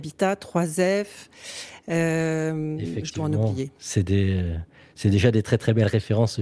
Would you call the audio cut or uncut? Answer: uncut